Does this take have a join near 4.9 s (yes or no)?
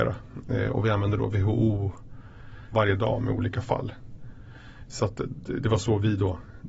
no